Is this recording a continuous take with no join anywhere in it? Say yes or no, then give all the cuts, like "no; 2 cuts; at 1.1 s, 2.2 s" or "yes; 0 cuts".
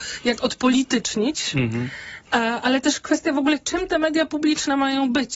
no; 1 cut; at 2.3 s